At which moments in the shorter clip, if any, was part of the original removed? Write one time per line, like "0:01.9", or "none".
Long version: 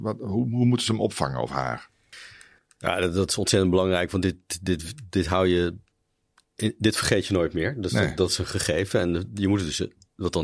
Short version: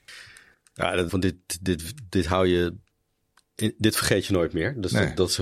0:01.1